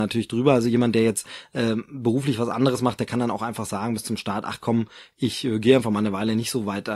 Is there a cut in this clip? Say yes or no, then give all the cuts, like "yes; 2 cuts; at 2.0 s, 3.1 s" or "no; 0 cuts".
no; 0 cuts